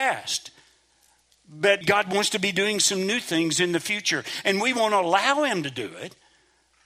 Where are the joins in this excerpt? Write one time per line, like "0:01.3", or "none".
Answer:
0:01.8